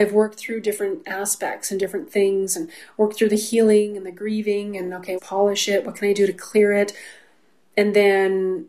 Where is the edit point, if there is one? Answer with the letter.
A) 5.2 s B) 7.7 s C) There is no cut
A